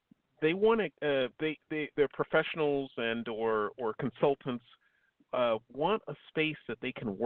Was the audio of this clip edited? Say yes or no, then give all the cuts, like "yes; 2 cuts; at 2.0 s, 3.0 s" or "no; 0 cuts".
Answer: no; 0 cuts